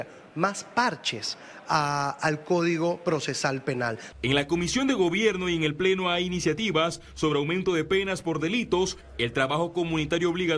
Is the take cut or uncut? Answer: cut